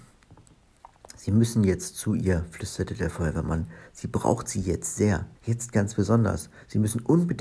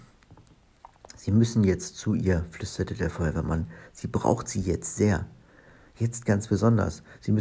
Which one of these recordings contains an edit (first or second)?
first